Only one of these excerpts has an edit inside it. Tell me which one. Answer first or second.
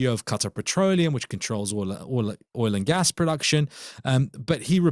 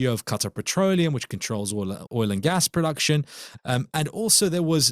second